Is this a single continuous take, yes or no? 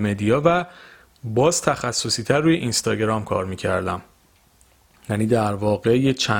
yes